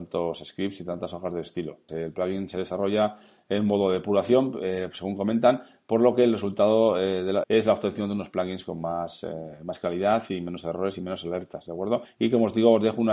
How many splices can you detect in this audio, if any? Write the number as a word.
two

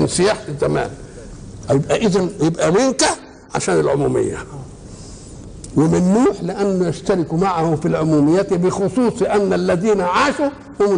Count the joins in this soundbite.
one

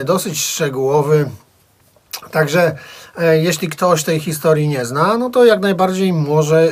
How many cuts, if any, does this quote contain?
zero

